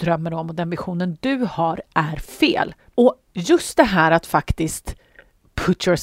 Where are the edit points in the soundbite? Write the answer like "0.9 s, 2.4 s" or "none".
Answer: 2.9 s